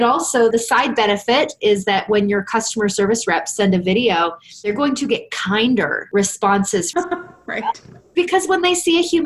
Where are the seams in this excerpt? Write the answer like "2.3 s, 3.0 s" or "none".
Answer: none